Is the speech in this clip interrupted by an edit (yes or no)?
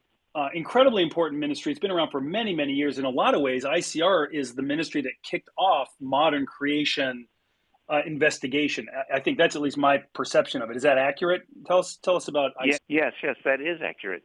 yes